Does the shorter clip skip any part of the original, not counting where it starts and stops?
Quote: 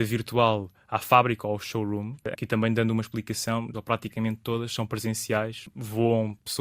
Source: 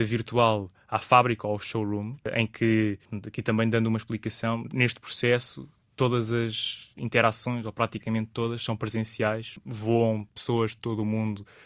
yes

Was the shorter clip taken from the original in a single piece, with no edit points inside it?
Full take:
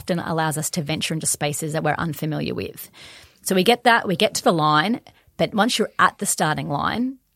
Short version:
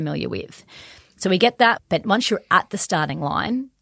no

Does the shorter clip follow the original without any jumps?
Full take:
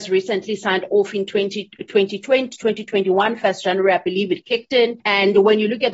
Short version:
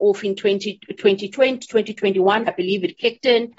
no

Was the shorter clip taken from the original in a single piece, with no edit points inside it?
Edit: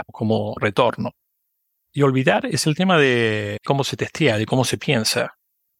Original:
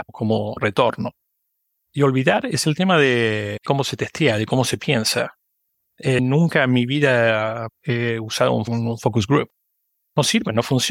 yes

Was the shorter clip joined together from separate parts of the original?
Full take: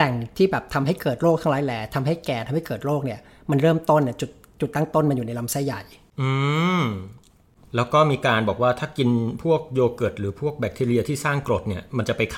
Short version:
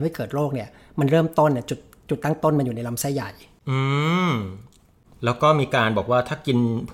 no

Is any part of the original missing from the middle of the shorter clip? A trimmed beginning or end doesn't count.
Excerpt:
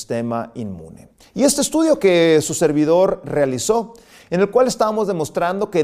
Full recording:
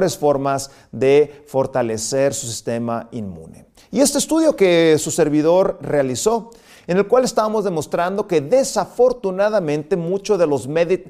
no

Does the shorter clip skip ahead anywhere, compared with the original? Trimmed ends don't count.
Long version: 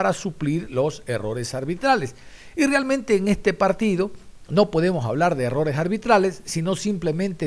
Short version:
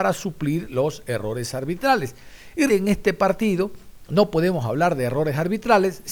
yes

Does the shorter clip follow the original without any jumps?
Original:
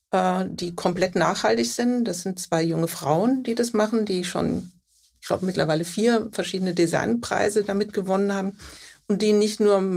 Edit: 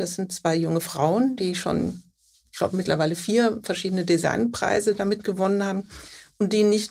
no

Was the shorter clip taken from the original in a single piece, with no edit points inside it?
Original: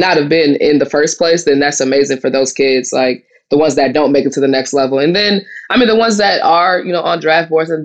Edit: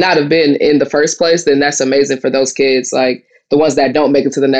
yes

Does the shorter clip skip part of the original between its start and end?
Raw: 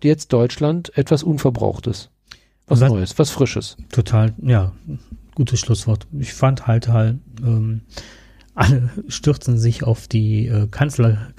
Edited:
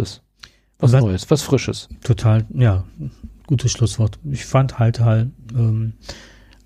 no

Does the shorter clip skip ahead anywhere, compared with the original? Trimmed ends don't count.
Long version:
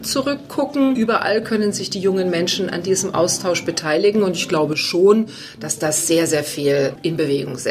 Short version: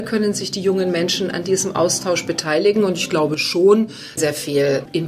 yes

